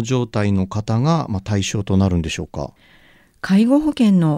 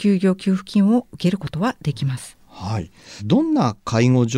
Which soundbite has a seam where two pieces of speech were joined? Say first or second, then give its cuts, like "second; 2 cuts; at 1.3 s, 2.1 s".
second; 1 cut; at 3.2 s